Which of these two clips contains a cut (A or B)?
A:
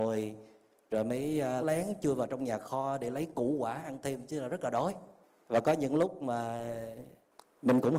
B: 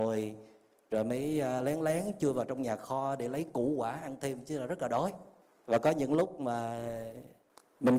A